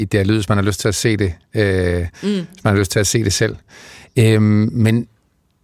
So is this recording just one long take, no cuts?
yes; 0 cuts

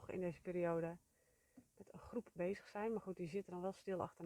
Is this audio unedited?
yes; 0 cuts

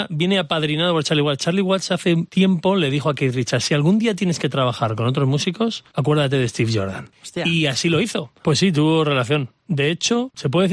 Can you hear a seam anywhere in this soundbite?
yes; 1 cut; at 8.4 s

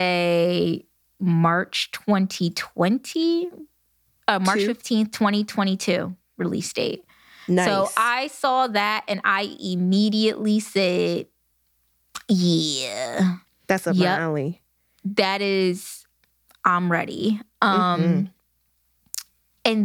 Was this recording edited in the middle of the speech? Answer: yes; 1 cut; at 13.4 s

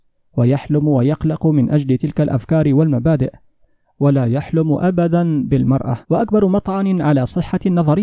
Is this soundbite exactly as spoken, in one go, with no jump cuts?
no; 1 cut; at 6.0 s

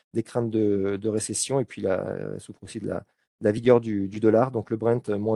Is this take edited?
no; 0 cuts

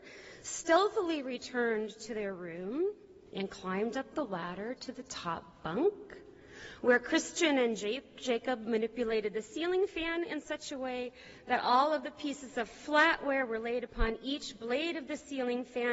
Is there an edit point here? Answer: no; 0 cuts

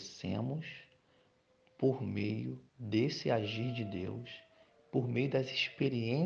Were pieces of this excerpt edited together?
yes; 1 cut; at 2.7 s

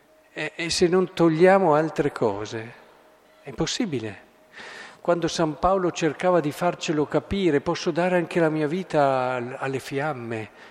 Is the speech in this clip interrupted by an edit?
yes; 1 cut; at 4.9 s

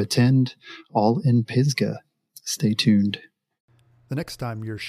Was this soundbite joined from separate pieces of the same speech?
no; 0 cuts

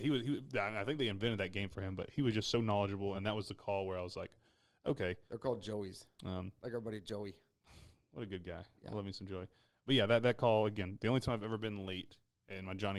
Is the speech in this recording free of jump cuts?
no; 2 cuts; at 3.1 s, 5.3 s

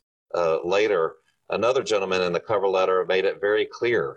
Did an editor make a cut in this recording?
no; 0 cuts

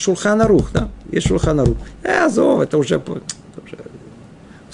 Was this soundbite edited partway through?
no; 0 cuts

